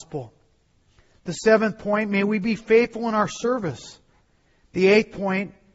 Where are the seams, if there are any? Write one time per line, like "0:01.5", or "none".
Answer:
0:04.6